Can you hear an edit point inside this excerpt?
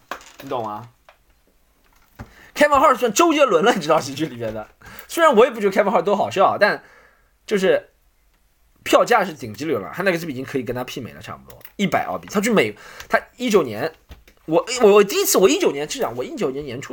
no; 0 cuts

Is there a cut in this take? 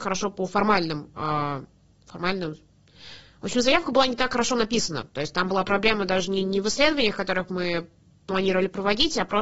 no; 0 cuts

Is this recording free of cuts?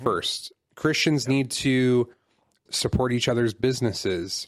no; 1 cut; at 2.7 s

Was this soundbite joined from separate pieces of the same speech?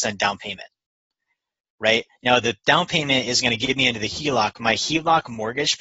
no; 0 cuts

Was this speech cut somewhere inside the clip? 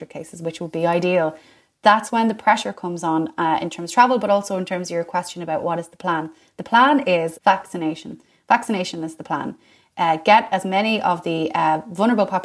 yes; 1 cut; at 7.4 s

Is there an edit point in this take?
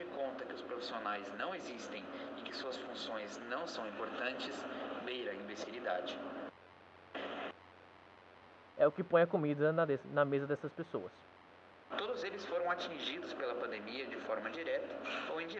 yes; 2 cuts; at 8.7 s, 11.9 s

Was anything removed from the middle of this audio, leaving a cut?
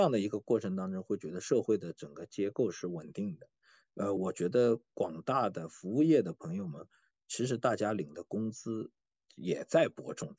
no; 0 cuts

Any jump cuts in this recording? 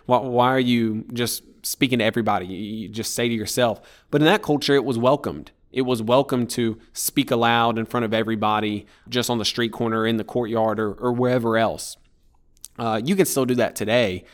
yes; 1 cut; at 9.1 s

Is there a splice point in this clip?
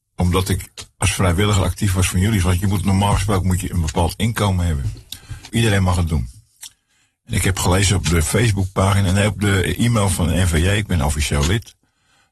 yes; 1 cut; at 5.5 s

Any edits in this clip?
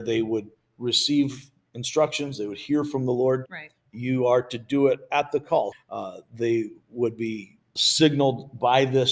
yes; 3 cuts; at 3.5 s, 5.7 s, 7.8 s

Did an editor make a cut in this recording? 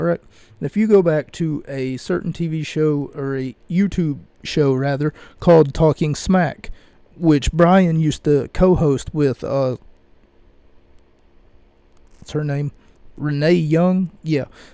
no; 0 cuts

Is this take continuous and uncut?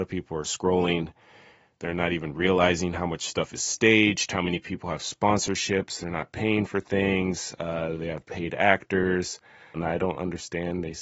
no; 1 cut; at 9.7 s

